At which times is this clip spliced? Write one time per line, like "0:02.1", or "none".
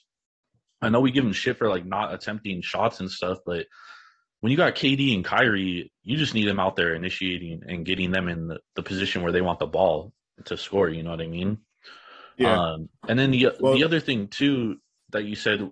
0:13.0

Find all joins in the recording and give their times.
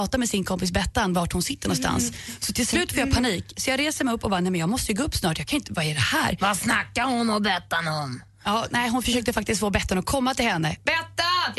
none

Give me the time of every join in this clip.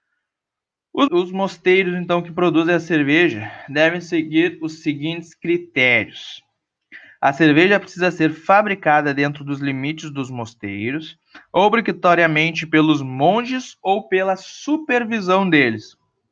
0:01.1

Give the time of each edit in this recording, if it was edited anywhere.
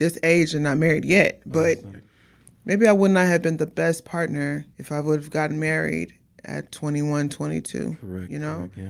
0:01.9
0:04.7

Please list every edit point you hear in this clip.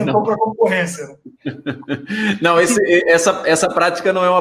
none

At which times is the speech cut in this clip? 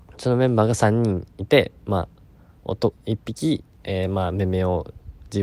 0:02.9

